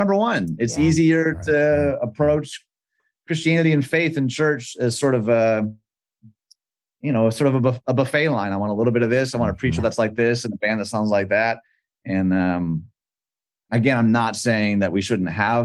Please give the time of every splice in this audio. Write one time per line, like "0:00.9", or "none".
none